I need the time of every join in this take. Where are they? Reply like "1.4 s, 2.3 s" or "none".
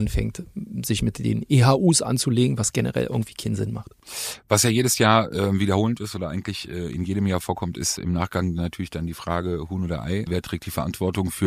10.3 s